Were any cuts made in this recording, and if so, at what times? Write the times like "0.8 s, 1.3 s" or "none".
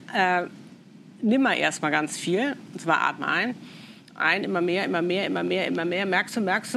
5.7 s